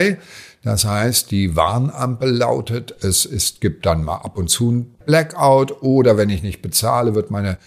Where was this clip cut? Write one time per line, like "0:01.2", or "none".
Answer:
none